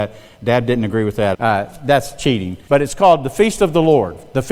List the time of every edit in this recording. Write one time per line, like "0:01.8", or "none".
0:01.3
0:02.7